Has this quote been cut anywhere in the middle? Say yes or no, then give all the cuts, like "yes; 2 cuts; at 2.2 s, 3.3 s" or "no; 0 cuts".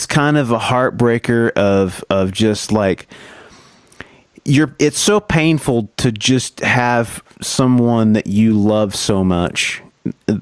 no; 0 cuts